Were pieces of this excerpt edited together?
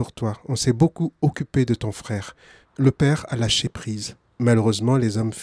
yes; 1 cut; at 2.6 s

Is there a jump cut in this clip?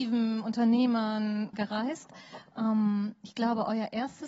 yes; 1 cut; at 1.5 s

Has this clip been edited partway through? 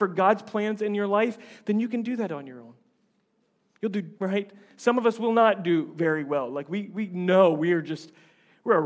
yes; 1 cut; at 4.2 s

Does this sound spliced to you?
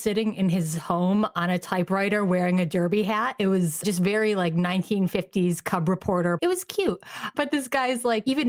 yes; 1 cut; at 6.4 s

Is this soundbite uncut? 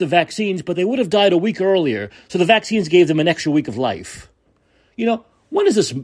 yes; 0 cuts

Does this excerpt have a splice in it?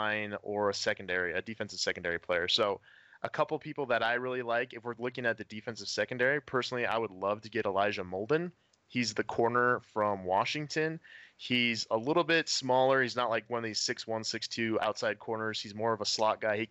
no; 0 cuts

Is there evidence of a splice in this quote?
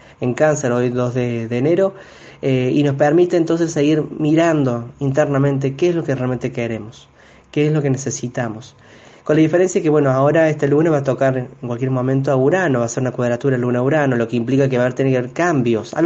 no; 0 cuts

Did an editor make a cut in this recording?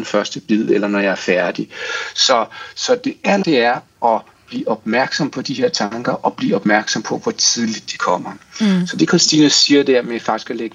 yes; 1 cut; at 3.4 s

